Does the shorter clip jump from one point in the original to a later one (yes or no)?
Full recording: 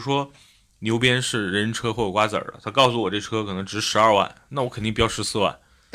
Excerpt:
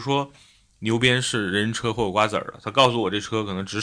no